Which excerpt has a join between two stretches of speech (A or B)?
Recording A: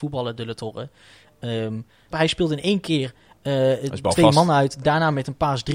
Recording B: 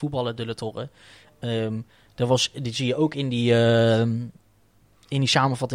A